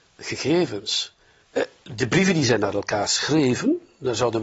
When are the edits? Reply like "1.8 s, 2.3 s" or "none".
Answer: 1.4 s

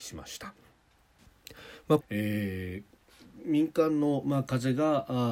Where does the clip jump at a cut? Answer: 2.0 s

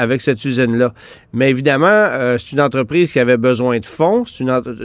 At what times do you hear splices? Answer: none

